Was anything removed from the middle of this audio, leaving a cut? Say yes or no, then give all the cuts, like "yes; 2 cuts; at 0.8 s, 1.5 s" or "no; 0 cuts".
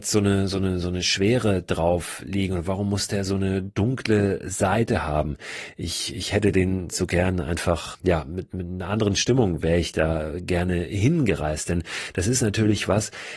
yes; 1 cut; at 7.9 s